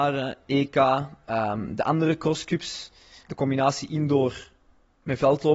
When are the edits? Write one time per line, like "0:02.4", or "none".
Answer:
0:03.3